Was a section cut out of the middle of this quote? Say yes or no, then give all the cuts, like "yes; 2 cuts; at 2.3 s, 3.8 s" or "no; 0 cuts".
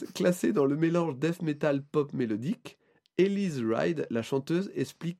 no; 0 cuts